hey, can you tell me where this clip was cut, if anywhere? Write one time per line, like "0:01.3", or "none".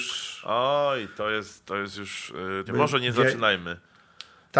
0:02.7